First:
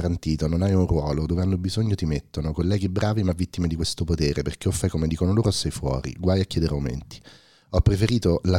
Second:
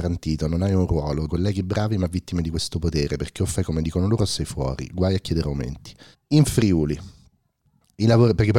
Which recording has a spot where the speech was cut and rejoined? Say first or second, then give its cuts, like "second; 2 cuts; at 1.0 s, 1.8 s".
second; 2 cuts; at 1.3 s, 6.1 s